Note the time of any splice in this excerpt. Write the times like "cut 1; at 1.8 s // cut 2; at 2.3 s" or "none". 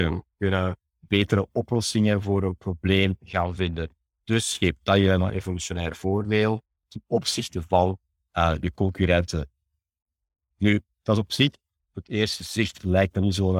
cut 1; at 11.8 s